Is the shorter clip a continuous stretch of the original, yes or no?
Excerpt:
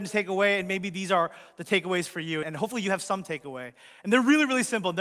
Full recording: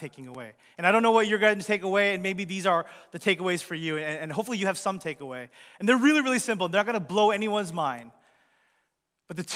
no